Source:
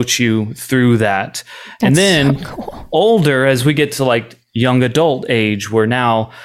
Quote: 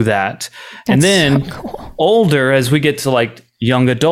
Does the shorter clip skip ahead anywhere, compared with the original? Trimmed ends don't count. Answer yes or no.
no